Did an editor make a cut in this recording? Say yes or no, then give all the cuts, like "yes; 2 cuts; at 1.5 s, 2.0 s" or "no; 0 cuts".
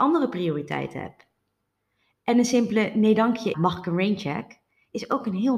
yes; 1 cut; at 3.5 s